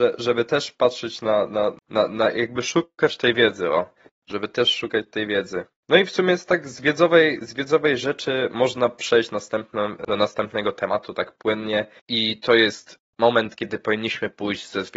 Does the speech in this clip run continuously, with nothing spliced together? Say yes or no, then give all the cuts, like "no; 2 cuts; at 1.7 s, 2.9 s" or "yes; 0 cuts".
yes; 0 cuts